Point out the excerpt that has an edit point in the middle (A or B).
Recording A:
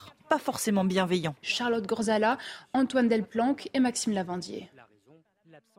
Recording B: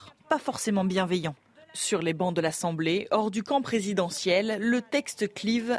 A